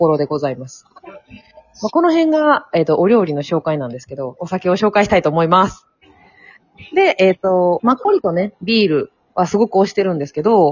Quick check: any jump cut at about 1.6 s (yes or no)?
no